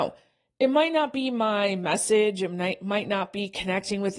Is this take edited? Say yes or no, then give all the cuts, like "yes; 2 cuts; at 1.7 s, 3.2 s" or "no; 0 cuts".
no; 0 cuts